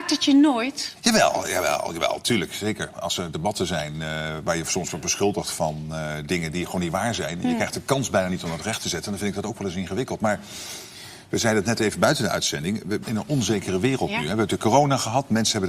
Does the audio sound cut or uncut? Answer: cut